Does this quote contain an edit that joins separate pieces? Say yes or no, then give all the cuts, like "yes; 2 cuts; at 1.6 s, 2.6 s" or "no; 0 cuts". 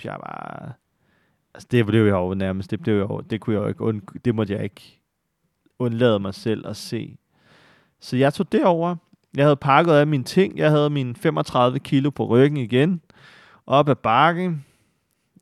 no; 0 cuts